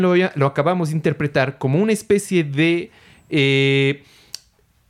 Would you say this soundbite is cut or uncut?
uncut